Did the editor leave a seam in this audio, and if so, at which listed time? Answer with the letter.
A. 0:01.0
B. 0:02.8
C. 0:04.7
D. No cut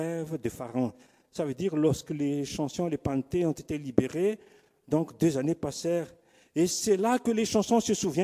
D